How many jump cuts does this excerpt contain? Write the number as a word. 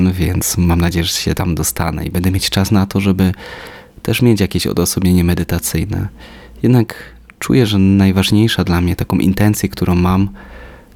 zero